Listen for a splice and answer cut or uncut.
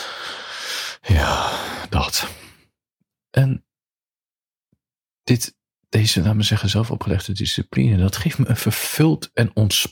uncut